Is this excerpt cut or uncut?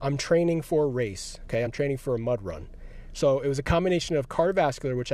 uncut